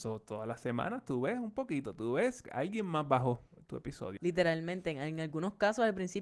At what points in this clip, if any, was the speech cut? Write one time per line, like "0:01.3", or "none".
0:02.4
0:04.2